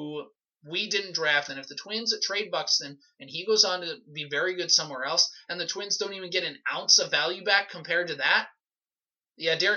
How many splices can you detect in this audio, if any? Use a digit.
1